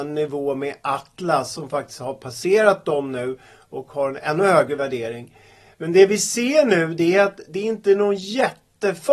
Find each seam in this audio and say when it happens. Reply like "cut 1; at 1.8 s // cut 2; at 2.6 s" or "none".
none